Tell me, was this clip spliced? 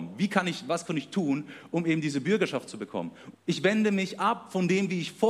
yes; 1 cut; at 3.3 s

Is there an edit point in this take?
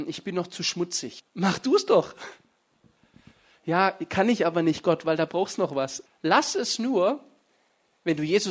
yes; 2 cuts; at 1.2 s, 6.1 s

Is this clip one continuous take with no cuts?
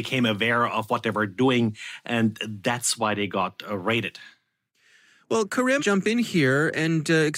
no; 1 cut; at 5.8 s

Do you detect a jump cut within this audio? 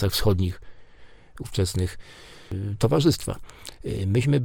no; 0 cuts

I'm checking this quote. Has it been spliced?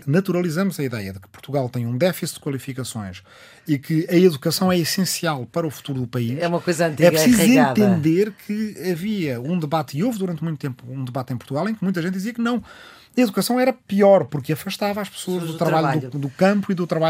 no; 0 cuts

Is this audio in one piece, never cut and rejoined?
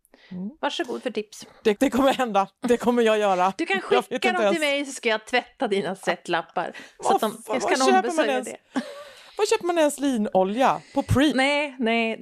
no; 2 cuts; at 1.7 s, 11.3 s

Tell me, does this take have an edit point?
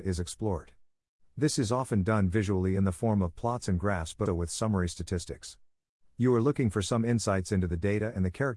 yes; 1 cut; at 4.3 s

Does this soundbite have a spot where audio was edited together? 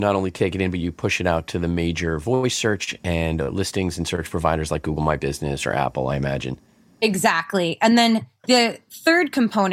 no; 0 cuts

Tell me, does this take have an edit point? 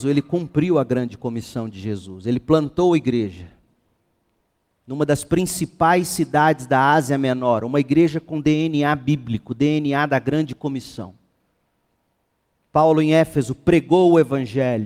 no; 0 cuts

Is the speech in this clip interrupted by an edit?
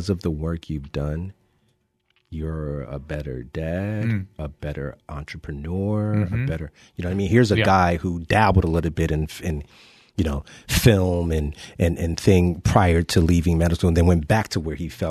no; 0 cuts

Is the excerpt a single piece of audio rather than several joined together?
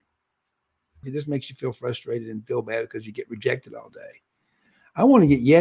no; 1 cut; at 1.0 s

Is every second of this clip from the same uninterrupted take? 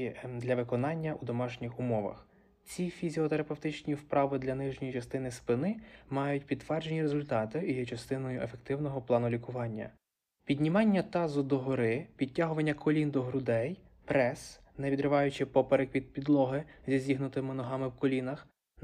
yes; 0 cuts

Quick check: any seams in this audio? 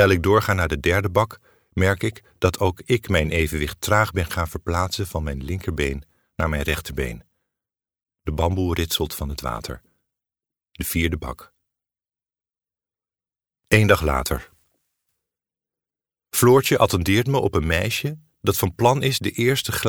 no; 0 cuts

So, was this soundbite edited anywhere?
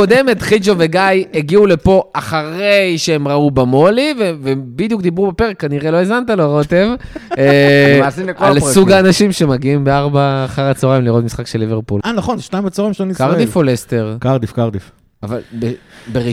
yes; 1 cut; at 12.0 s

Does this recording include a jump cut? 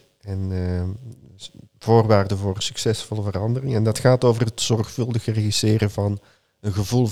no; 0 cuts

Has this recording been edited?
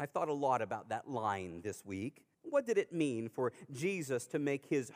yes; 1 cut; at 2.3 s

